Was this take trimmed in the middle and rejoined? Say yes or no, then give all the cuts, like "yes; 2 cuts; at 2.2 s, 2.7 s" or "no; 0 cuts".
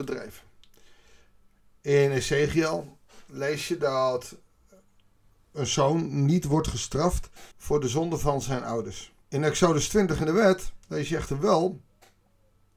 yes; 3 cuts; at 7.5 s, 9.2 s, 10.8 s